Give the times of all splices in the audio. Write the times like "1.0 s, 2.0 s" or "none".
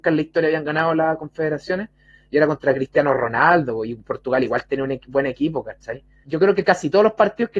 6.2 s